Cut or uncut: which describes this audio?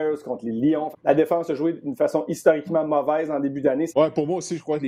cut